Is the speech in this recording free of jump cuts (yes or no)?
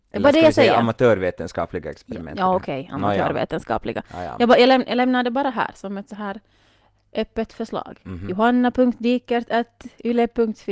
yes